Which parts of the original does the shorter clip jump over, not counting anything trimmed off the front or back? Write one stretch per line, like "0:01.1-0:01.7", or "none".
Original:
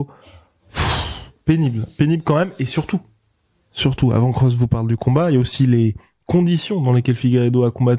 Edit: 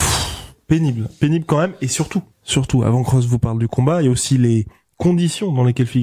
0:03.1-0:03.6